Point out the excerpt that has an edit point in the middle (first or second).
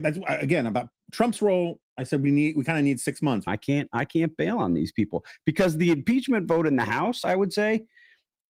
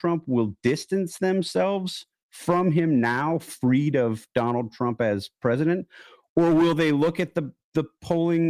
first